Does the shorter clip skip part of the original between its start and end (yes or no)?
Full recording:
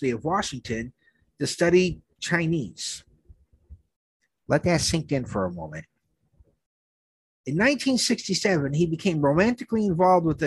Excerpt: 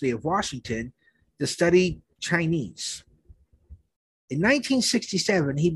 yes